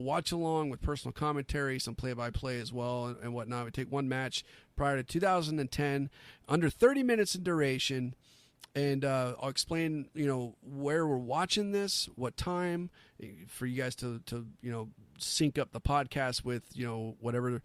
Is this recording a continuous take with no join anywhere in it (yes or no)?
yes